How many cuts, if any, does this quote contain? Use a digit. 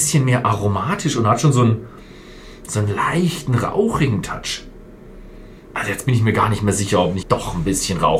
1